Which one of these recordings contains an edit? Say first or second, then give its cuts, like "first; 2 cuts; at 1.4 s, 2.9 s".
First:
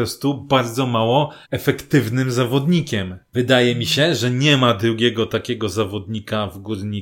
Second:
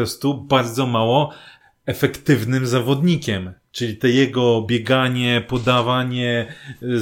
first; 2 cuts; at 1.4 s, 3.3 s